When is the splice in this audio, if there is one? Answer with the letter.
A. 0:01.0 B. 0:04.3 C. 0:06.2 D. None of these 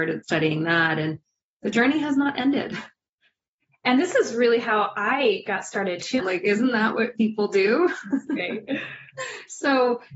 C